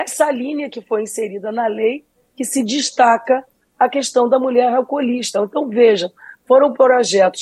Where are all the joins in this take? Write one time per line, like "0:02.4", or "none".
none